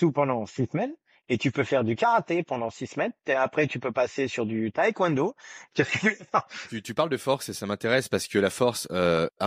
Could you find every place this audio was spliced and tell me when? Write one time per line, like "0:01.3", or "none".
0:05.7